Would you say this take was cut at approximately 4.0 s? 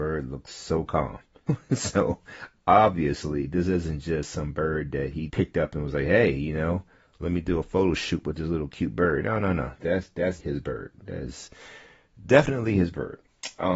no; 3 cuts; at 1.5 s, 5.3 s, 10.4 s

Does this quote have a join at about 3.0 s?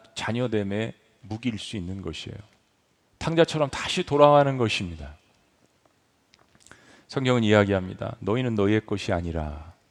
yes; 1 cut; at 3.0 s

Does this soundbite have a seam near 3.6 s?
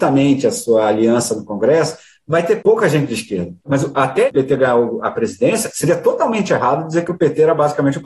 yes; 1 cut; at 3.6 s

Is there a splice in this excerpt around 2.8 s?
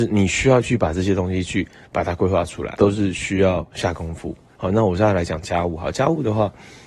yes; 1 cut; at 2.8 s

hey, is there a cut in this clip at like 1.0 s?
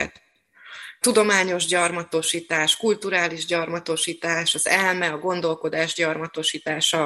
yes; 1 cut; at 1.0 s

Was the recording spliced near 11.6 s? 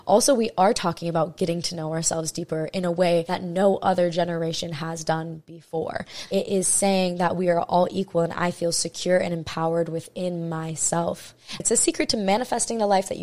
yes; 2 cuts; at 6.3 s, 11.6 s

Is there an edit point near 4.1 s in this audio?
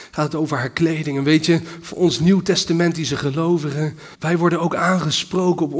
yes; 1 cut; at 4.1 s

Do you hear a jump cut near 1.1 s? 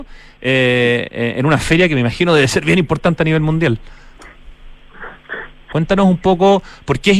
no; 1 cut; at 5.7 s

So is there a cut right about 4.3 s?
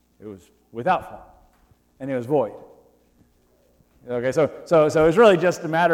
no; 0 cuts

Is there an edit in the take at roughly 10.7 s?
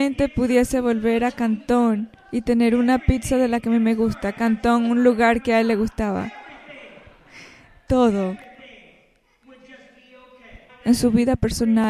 yes; 1 cut; at 10.7 s

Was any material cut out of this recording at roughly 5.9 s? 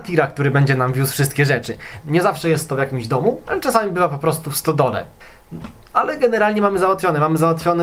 no; 2 cuts; at 2.0 s, 3.4 s

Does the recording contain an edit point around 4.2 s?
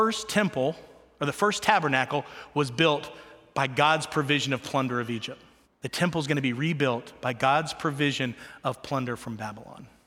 no; 1 cut; at 5.6 s

